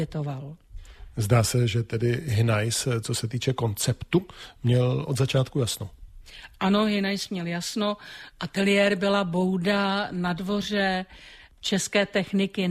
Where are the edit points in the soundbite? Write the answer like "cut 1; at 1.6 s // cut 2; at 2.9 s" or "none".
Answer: cut 1; at 8.3 s